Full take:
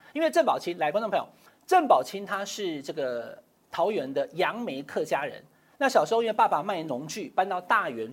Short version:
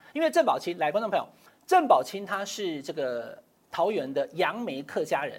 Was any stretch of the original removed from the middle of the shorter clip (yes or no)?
no